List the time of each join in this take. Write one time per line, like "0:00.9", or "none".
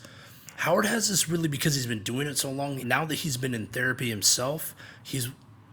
0:02.8